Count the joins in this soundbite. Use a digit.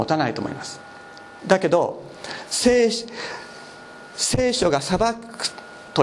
1